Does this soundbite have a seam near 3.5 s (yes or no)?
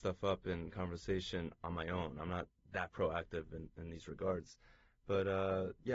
no